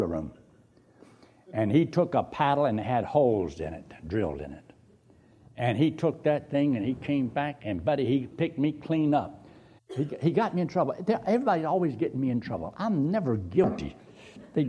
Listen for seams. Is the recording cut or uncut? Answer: cut